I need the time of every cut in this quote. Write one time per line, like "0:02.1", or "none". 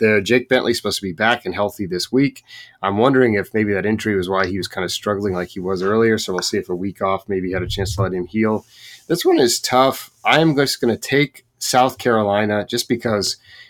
none